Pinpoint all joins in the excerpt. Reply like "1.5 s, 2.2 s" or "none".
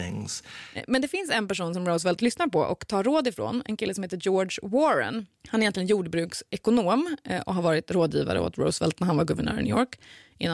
5.4 s